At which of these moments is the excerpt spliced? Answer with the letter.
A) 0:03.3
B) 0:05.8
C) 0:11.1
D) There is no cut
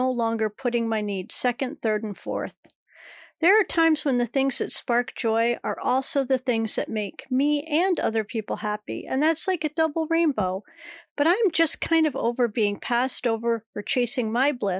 D